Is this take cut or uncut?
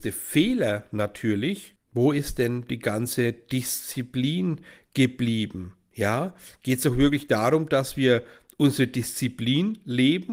cut